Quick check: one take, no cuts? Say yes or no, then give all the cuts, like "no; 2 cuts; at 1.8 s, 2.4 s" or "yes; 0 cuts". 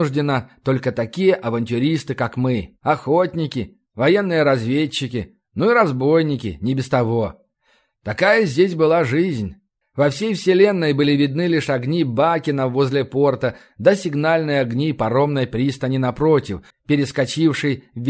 no; 2 cuts; at 9.8 s, 16.7 s